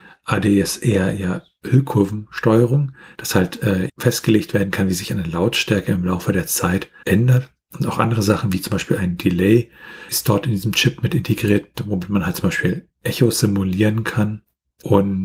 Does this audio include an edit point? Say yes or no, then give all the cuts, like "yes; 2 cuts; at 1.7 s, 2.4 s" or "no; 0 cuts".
yes; 2 cuts; at 3.9 s, 7.0 s